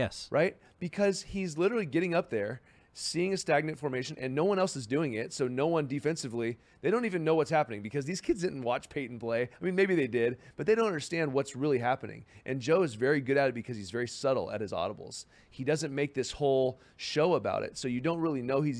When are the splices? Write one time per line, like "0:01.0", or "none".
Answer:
none